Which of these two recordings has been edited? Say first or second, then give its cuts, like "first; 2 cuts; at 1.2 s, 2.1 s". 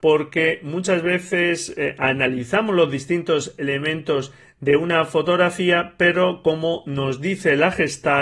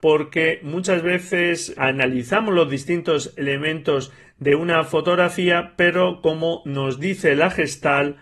second; 1 cut; at 1.7 s